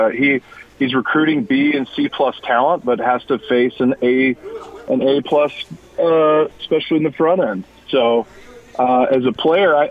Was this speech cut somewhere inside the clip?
yes; 1 cut; at 6.5 s

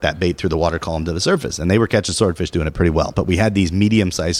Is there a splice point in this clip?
yes; 1 cut; at 3.1 s

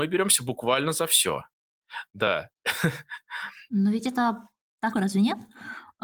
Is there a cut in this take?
yes; 1 cut; at 4.9 s

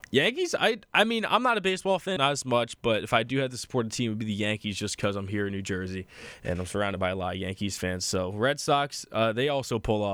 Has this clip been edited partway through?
yes; 1 cut; at 2.2 s

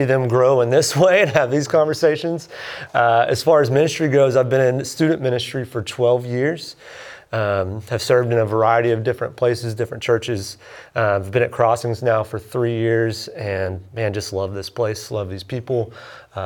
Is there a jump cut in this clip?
no; 0 cuts

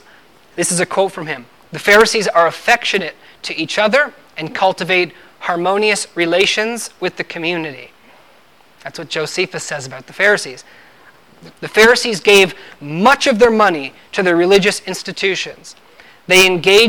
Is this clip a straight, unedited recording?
no; 1 cut; at 11.5 s

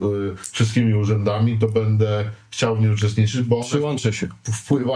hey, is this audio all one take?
yes; 0 cuts

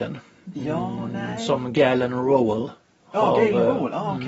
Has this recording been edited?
no; 0 cuts

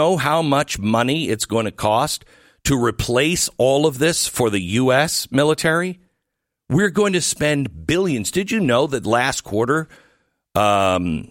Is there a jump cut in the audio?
no; 0 cuts

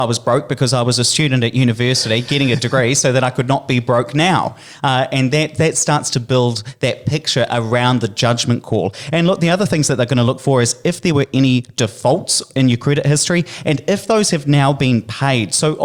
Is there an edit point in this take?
no; 0 cuts

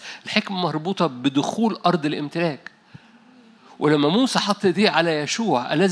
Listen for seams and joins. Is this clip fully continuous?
yes; 0 cuts

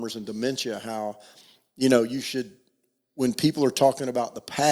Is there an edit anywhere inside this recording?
no; 0 cuts

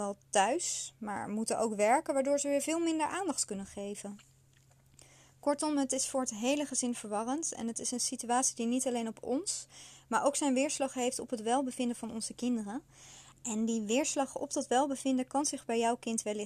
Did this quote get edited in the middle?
no; 0 cuts

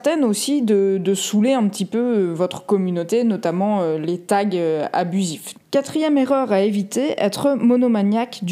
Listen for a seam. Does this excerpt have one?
yes; 1 cut; at 5.5 s

